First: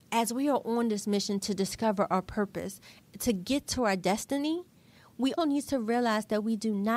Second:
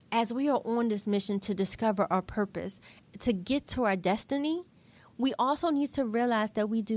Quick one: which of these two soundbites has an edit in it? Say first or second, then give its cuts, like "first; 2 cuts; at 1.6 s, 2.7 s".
first; 1 cut; at 5.4 s